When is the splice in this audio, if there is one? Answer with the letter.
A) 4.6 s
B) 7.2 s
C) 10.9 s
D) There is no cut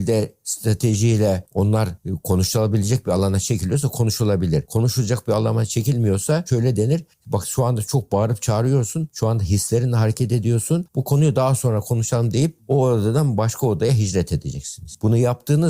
C